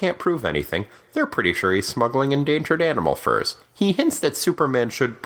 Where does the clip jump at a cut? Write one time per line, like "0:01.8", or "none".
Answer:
none